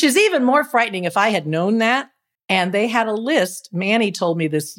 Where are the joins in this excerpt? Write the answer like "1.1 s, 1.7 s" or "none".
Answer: 2.3 s